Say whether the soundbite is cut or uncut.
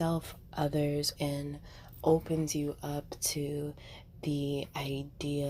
cut